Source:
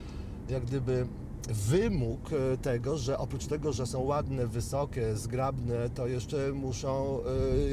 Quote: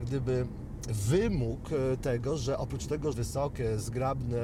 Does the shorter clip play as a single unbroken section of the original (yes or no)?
no